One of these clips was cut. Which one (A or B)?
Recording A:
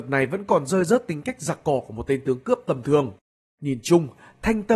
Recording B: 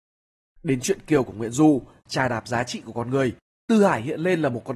B